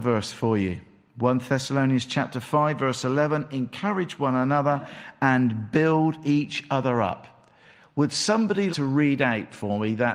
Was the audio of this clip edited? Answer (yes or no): yes